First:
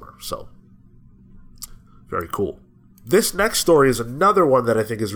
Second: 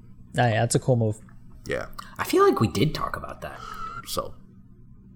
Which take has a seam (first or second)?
second